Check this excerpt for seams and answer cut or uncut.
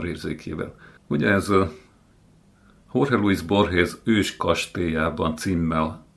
cut